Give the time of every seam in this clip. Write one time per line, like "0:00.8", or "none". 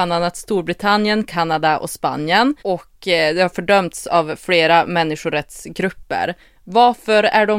0:02.6